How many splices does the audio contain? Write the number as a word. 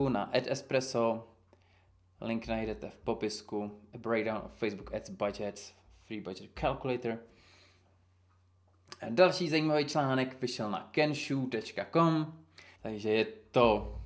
one